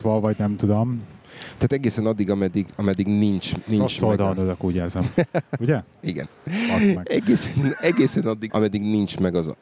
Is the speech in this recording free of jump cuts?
no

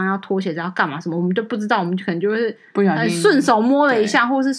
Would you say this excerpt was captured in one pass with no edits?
yes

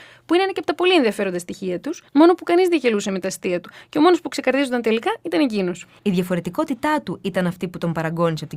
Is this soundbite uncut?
no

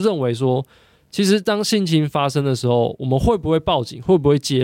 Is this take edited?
no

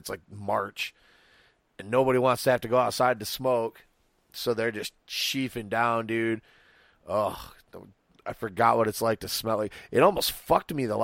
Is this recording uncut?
yes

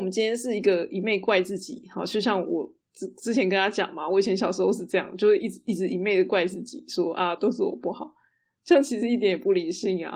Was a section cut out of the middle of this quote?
yes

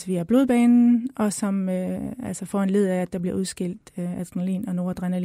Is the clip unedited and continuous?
yes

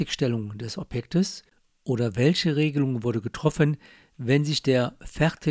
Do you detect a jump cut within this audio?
no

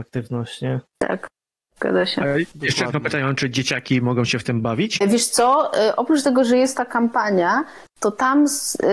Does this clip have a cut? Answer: yes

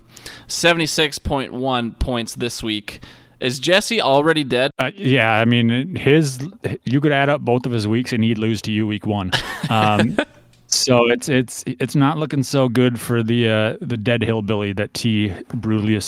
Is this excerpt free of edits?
no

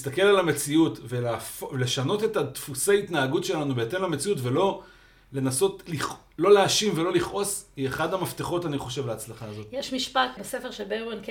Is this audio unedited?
no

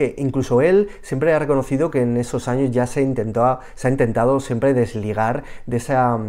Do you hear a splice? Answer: no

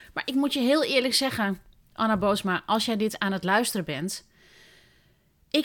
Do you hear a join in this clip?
no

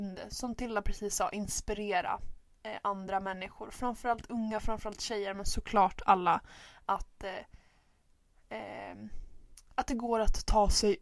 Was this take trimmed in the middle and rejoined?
no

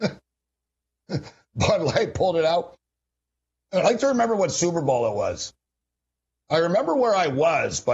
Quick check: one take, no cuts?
yes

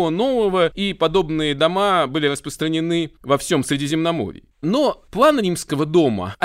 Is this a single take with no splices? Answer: no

